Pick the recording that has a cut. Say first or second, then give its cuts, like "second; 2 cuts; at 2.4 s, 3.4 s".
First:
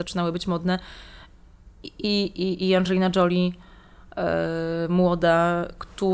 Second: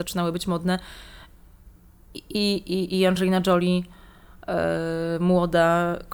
first; 1 cut; at 1.7 s